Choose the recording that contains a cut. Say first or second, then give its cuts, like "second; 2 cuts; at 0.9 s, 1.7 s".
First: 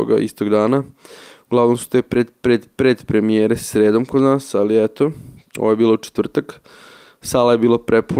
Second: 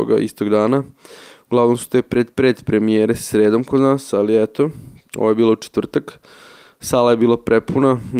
second; 1 cut; at 2.3 s